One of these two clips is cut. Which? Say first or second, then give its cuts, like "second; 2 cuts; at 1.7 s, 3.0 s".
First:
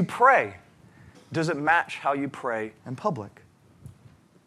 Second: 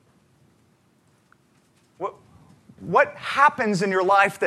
first; 2 cuts; at 1.1 s, 2.8 s